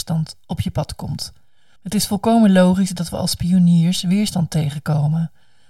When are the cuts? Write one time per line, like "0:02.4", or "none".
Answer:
0:01.8